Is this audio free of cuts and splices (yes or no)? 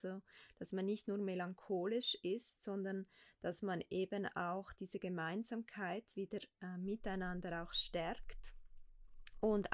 yes